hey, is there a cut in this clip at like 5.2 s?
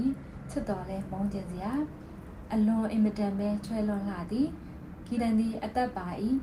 yes; 1 cut; at 5.2 s

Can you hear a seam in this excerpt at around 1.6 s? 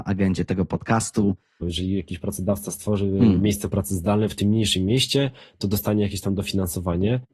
yes; 1 cut; at 1.6 s

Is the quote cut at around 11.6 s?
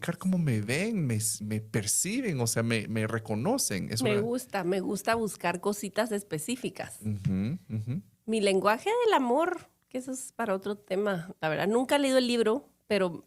no; 1 cut; at 1.4 s

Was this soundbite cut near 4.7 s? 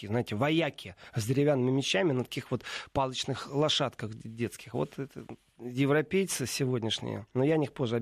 no; 0 cuts

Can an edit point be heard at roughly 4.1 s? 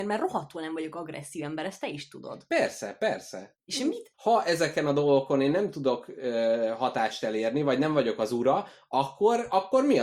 yes; 1 cut; at 4.1 s

